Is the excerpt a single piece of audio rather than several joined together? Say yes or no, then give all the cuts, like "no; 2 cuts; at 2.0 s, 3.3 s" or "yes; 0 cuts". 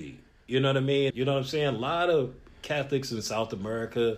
no; 1 cut; at 1.1 s